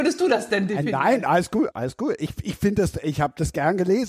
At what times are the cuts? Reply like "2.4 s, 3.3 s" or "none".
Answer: 1.7 s

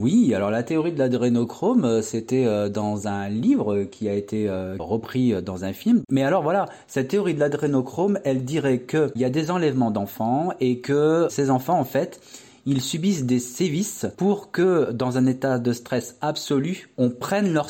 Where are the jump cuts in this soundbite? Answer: none

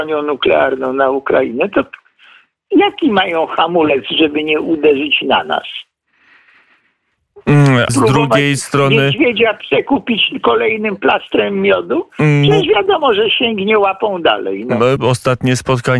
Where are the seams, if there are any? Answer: 7.9 s, 15.0 s

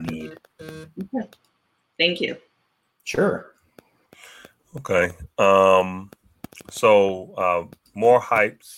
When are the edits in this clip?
none

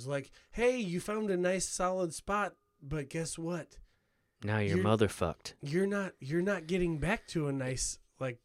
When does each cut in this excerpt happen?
none

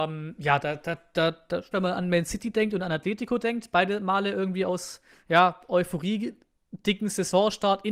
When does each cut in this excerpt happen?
1.7 s

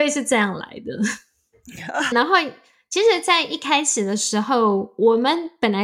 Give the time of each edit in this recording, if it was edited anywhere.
2.1 s

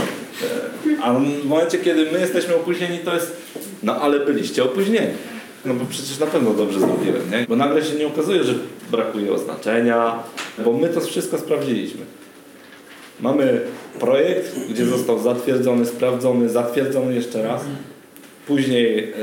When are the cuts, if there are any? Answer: 5.6 s, 7.4 s, 10.6 s

